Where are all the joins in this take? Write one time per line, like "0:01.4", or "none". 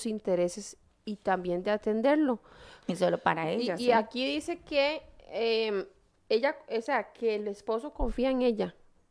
0:02.8